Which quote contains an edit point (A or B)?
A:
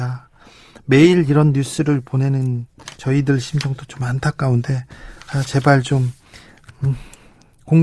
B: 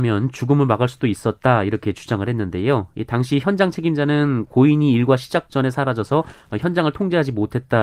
A